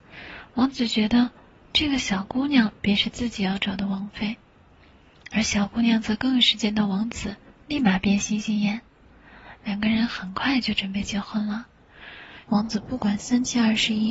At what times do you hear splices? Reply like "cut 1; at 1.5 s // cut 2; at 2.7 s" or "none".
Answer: cut 1; at 12.5 s